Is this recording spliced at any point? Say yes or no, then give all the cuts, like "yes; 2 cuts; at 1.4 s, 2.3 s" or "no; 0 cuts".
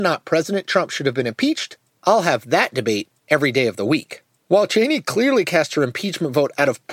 yes; 1 cut; at 4.4 s